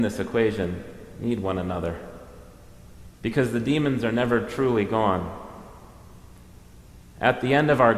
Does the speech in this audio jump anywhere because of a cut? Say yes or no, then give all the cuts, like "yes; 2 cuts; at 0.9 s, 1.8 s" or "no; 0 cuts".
no; 0 cuts